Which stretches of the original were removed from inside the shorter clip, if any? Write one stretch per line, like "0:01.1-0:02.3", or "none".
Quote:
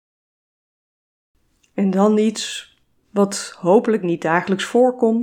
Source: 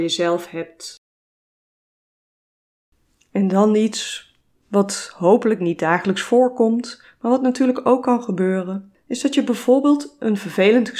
none